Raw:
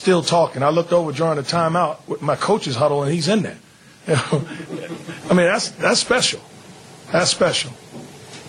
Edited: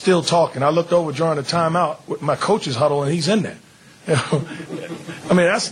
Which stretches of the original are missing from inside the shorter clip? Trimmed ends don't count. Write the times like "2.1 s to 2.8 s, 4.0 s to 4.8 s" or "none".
none